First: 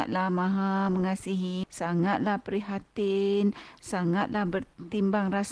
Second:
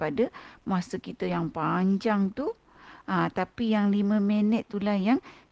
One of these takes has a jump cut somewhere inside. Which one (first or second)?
first